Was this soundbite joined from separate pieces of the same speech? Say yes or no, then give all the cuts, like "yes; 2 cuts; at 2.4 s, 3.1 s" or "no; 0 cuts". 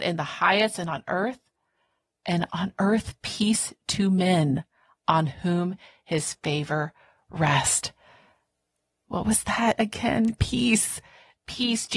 no; 0 cuts